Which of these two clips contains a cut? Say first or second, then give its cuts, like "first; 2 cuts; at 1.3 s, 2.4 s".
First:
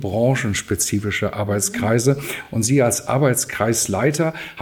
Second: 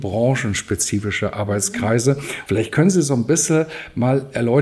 second; 1 cut; at 2.4 s